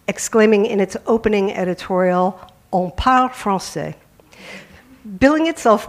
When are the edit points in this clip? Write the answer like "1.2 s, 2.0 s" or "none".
none